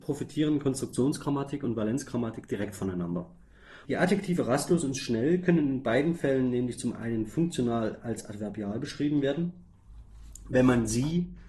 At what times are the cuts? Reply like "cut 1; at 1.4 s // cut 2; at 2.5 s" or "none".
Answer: cut 1; at 3.8 s